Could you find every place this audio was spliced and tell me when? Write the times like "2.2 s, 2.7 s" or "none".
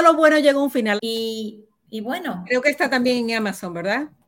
1.0 s